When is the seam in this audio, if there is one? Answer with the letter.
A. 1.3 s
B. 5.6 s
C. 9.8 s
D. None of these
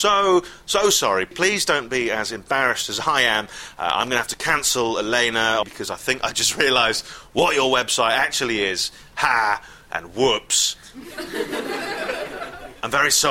B